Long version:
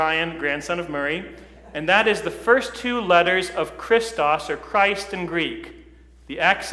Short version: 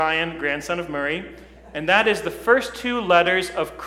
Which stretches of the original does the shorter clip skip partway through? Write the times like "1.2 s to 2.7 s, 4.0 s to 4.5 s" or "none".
none